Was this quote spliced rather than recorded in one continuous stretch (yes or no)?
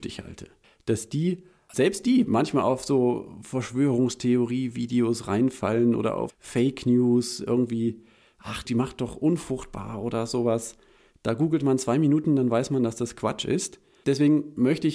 yes